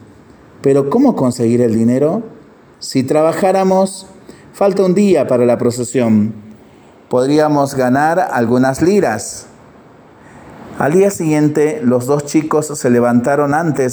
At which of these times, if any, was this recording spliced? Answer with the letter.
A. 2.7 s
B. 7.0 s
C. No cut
A